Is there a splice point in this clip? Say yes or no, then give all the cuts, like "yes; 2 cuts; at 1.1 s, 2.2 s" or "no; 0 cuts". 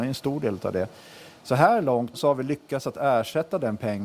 yes; 1 cut; at 2.1 s